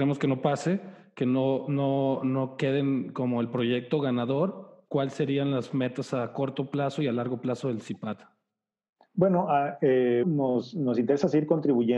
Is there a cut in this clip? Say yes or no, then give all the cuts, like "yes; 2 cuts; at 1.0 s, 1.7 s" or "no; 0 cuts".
yes; 1 cut; at 10.2 s